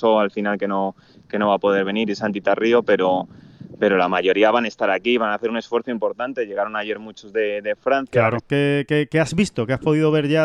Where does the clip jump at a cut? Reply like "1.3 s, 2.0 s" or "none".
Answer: 8.4 s